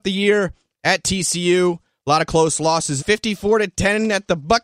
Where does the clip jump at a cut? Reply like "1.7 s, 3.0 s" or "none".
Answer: 3.0 s